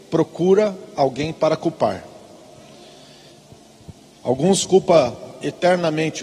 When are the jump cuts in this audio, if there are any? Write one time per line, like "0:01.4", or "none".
none